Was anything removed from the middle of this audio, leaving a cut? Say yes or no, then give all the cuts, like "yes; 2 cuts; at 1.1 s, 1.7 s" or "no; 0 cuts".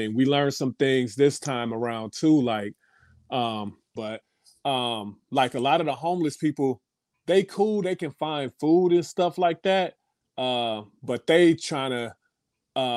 yes; 1 cut; at 4.0 s